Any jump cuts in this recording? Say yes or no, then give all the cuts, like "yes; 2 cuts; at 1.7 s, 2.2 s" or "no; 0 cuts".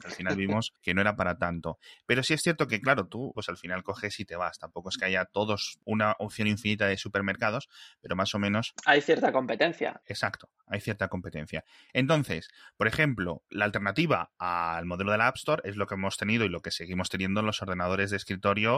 yes; 1 cut; at 3.3 s